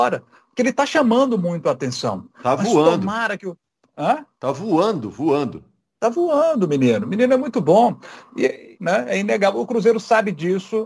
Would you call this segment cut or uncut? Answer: cut